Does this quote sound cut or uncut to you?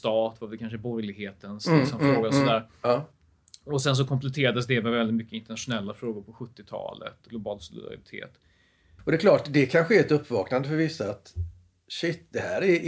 cut